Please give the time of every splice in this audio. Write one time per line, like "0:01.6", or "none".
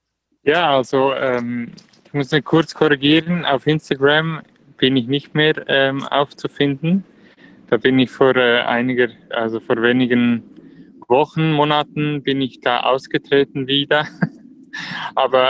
none